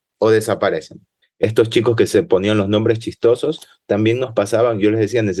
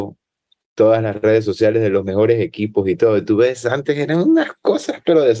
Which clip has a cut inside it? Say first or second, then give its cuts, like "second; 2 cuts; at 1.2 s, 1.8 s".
first; 1 cut; at 1.2 s